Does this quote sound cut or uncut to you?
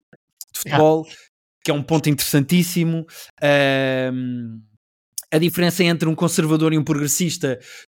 uncut